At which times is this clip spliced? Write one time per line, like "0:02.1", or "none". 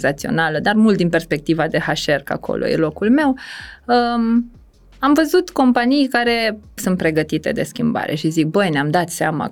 0:06.8